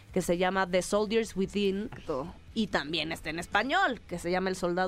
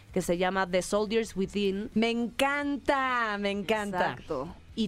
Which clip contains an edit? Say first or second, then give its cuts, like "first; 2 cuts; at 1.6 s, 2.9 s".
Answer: first; 1 cut; at 1.9 s